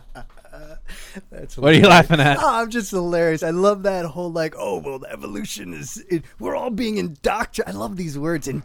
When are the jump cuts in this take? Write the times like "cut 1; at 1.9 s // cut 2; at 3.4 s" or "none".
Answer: none